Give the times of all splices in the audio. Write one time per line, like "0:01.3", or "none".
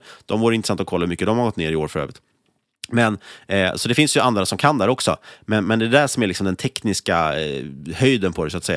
none